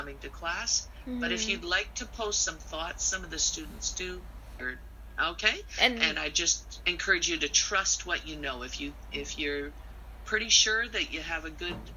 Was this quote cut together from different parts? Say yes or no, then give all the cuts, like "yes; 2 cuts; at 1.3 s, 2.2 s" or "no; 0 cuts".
yes; 1 cut; at 4.6 s